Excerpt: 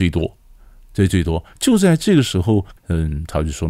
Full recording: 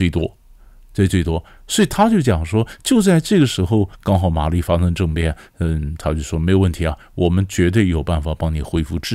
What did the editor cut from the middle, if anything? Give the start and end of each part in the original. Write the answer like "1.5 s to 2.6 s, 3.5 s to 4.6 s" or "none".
1.5 s to 2.8 s, 4.0 s to 5.5 s